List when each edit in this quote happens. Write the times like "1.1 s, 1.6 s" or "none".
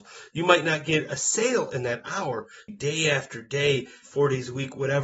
2.7 s, 4.0 s